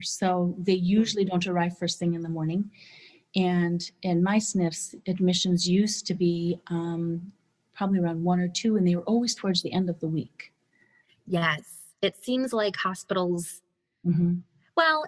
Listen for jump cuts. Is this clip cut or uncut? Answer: uncut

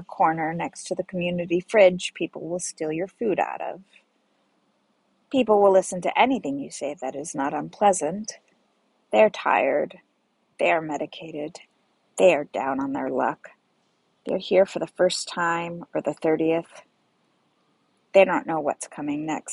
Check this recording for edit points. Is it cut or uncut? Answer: uncut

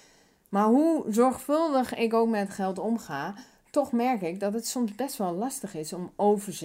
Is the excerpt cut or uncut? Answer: uncut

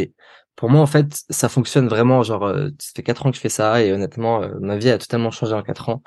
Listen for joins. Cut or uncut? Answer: uncut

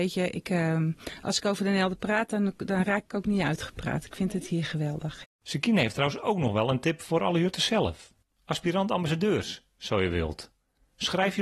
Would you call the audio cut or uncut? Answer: uncut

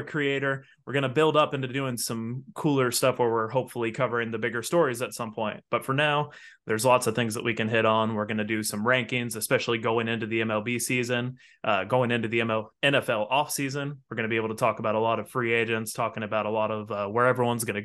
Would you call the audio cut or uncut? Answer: uncut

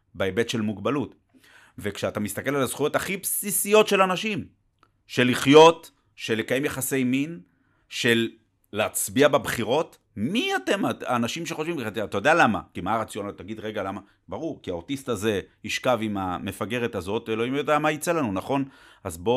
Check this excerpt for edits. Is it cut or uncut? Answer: uncut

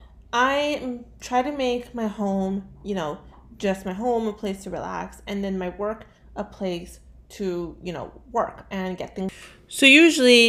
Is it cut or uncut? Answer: uncut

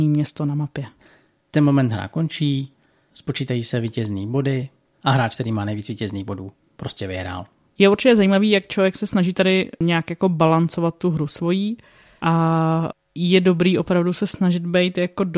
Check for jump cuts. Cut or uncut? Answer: uncut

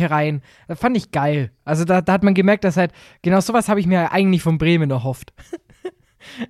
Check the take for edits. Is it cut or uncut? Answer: uncut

